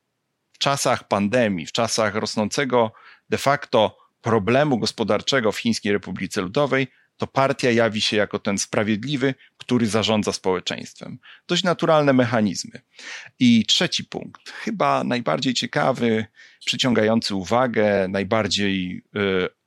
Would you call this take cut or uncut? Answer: uncut